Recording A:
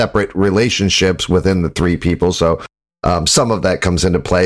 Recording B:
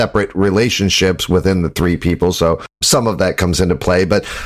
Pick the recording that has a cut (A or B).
B